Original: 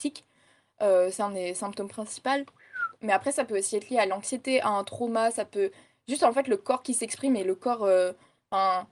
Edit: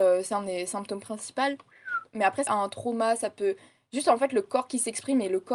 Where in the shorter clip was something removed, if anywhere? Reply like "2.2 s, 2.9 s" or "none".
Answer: 2.5 s